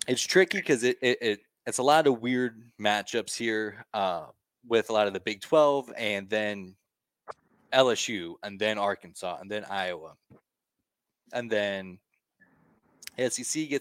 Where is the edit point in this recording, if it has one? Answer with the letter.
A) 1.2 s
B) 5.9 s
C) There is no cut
C